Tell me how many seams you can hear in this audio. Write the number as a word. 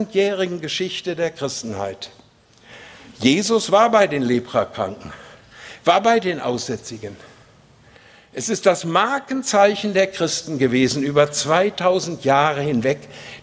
zero